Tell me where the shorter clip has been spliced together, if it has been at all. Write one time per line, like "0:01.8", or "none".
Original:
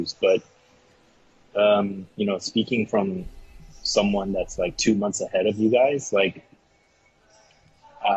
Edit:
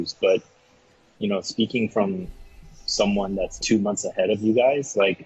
0:01.1
0:03.6